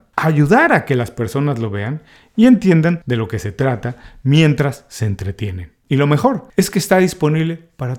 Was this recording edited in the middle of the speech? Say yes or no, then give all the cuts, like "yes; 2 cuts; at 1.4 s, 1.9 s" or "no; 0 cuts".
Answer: yes; 1 cut; at 5.8 s